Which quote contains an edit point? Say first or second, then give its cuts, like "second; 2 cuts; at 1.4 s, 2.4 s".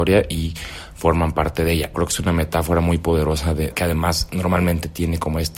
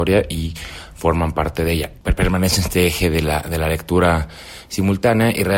first; 2 cuts; at 1.9 s, 3.7 s